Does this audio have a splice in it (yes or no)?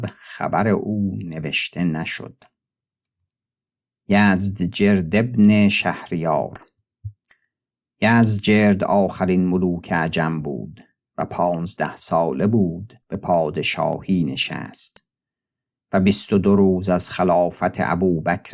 yes